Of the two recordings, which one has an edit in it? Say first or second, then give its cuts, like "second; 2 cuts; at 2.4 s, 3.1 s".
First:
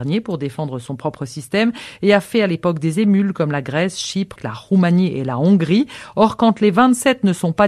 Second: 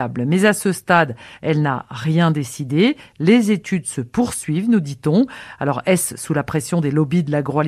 first; 1 cut; at 4.4 s